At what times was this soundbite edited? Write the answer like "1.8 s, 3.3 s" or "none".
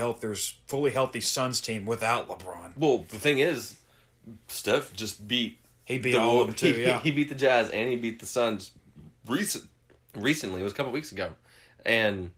none